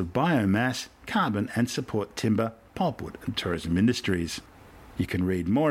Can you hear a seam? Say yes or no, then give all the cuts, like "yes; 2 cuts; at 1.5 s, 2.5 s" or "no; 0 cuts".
no; 0 cuts